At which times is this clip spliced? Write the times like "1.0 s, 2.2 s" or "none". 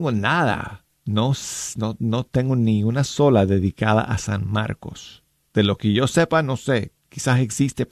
none